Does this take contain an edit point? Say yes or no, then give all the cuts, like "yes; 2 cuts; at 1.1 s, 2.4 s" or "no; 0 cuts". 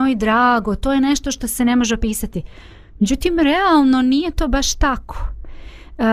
no; 0 cuts